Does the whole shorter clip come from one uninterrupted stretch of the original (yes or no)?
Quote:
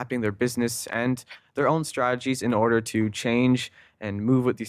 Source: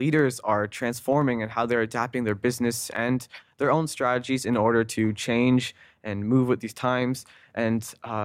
yes